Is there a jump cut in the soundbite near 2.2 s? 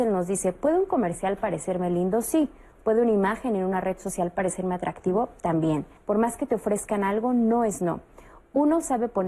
no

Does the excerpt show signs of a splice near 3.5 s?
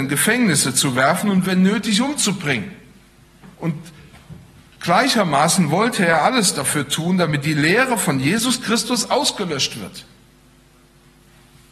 yes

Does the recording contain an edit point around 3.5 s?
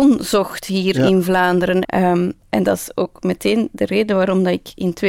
no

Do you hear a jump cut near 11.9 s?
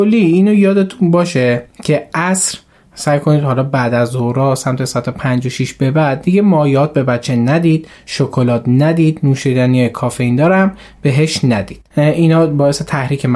yes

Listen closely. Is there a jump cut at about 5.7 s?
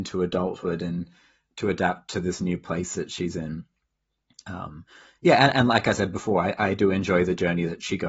no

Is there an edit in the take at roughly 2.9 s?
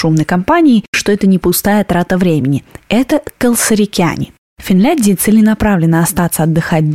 no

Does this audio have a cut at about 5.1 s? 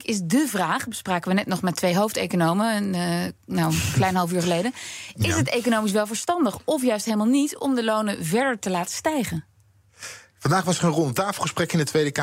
no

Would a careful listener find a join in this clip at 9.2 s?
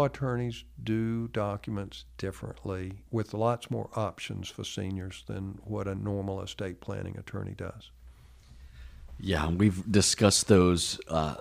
no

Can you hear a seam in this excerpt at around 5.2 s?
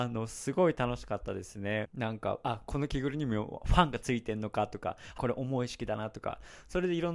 yes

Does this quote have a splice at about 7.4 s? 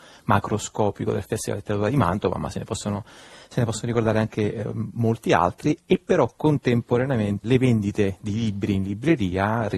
yes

